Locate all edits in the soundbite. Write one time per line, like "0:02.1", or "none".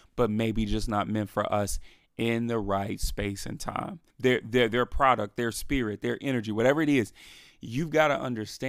0:04.1

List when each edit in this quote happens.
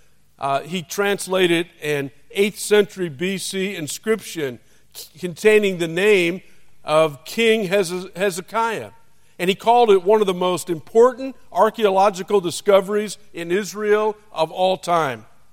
none

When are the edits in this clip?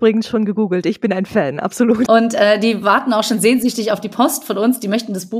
0:02.1

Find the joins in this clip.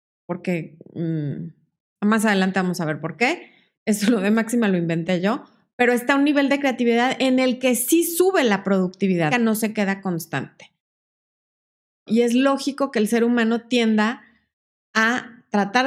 0:09.3
0:12.1

